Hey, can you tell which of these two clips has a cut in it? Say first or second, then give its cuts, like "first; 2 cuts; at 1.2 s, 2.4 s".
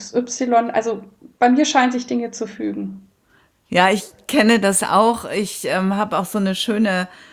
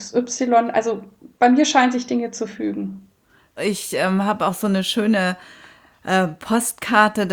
second; 1 cut; at 3.6 s